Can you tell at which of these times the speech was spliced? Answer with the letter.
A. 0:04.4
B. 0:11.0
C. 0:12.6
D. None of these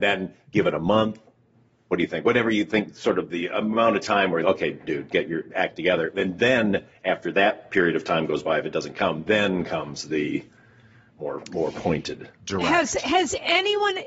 A